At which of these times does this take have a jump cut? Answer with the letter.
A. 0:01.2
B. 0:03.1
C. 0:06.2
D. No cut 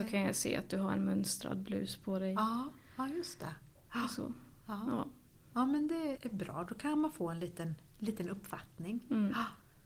C